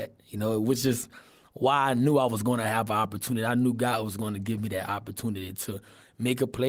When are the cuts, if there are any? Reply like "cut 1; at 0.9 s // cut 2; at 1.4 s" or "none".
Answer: none

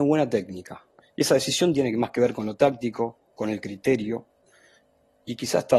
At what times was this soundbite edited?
cut 1; at 1.0 s

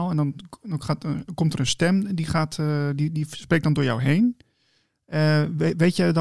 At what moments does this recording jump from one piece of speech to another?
none

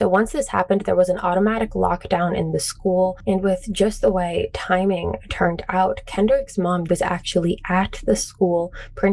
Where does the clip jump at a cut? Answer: cut 1; at 6.9 s

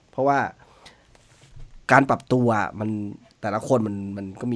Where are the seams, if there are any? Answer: cut 1; at 1.8 s

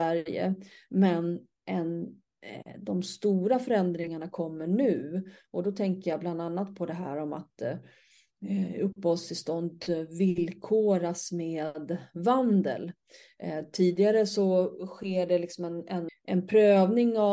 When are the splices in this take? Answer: cut 1; at 16.1 s

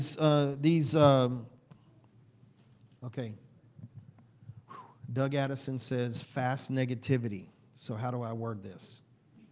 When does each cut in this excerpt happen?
none

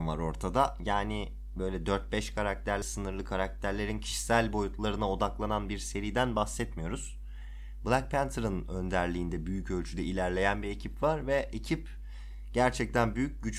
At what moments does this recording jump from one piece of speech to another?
cut 1; at 2.8 s

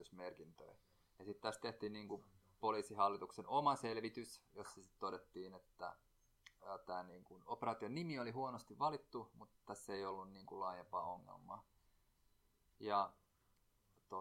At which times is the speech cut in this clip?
cut 1; at 12.7 s

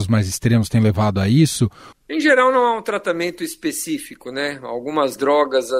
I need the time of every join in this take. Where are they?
cut 1; at 1.9 s

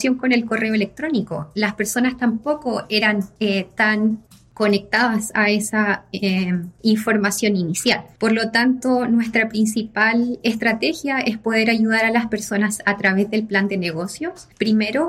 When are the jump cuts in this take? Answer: none

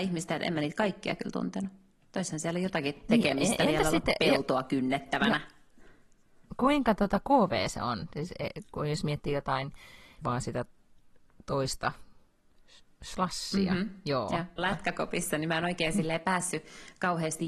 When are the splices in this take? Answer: cut 1; at 10.2 s // cut 2; at 14.6 s

